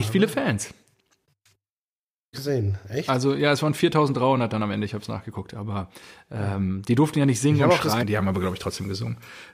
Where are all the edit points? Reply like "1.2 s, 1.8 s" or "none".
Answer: 2.3 s, 8.0 s